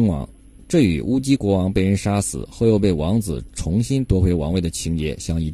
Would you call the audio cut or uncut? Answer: cut